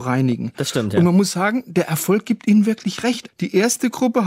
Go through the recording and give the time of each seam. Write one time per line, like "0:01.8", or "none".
0:03.3